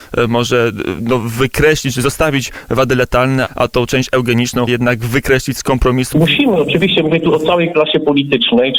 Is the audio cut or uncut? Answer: cut